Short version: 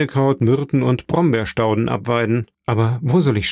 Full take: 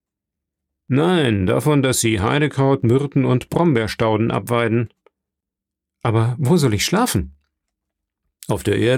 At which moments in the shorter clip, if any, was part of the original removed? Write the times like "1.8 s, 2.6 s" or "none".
2.5 s